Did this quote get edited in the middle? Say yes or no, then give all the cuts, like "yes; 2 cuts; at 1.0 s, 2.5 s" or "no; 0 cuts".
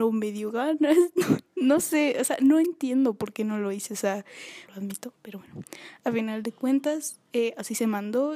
yes; 1 cut; at 4.7 s